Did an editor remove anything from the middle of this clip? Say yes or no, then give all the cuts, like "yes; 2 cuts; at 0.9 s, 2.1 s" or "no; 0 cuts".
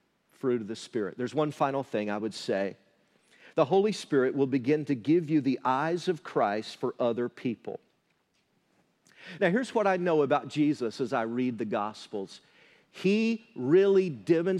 no; 0 cuts